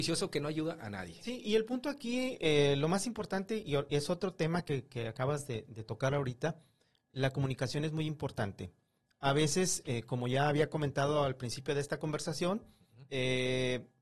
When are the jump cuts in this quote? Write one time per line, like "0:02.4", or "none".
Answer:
none

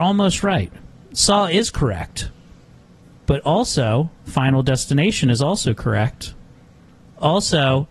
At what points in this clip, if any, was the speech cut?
none

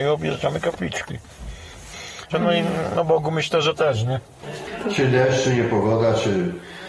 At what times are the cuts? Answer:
0:02.3

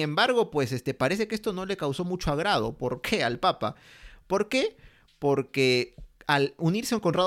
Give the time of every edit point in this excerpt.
none

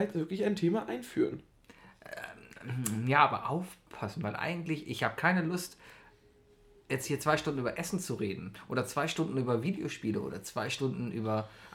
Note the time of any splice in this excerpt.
none

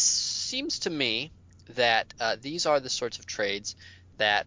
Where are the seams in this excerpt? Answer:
none

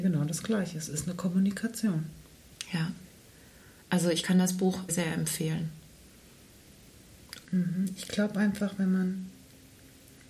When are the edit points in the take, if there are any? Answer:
0:04.9
0:07.4

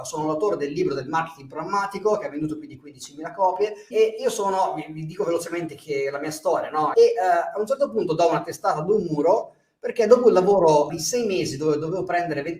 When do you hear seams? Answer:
0:03.9
0:06.9
0:10.9

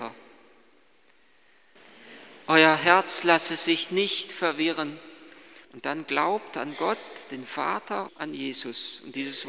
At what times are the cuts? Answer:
0:05.6
0:08.1

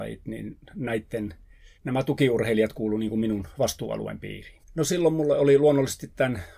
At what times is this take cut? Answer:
0:01.8
0:04.6

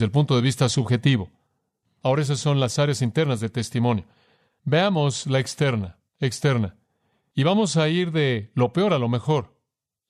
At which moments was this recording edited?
0:06.1

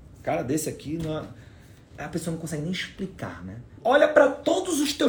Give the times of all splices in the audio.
0:02.0
0:03.8

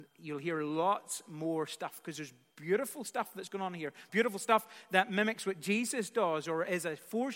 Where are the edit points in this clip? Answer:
0:04.1

